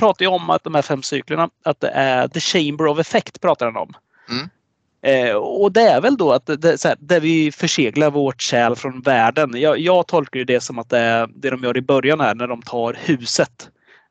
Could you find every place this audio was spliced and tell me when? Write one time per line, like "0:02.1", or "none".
none

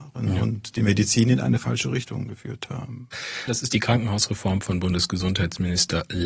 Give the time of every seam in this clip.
0:03.5

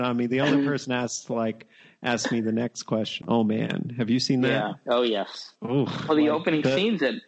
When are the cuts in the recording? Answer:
0:03.2

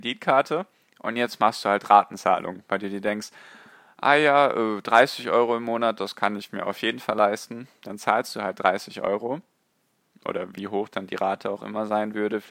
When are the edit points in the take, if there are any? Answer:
none

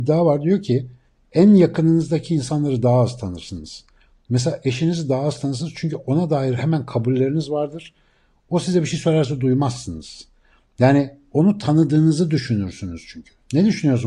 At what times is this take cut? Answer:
none

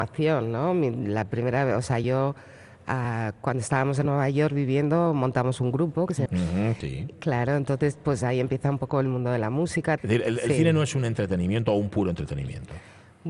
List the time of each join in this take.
0:06.3
0:10.0

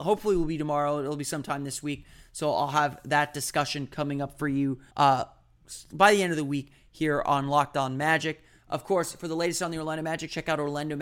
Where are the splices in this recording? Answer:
0:04.9

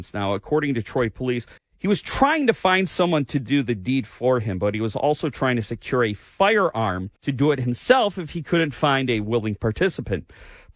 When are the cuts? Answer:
0:01.6
0:07.2

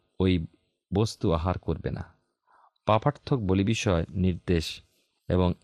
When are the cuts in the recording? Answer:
none

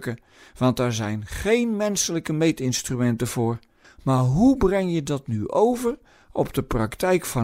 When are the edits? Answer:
0:03.8

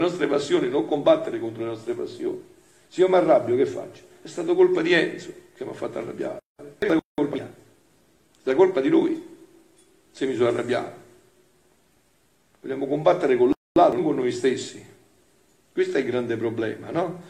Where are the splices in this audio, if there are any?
none

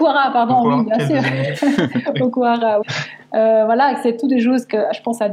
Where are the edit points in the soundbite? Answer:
0:02.8

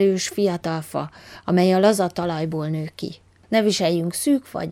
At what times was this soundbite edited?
0:03.4

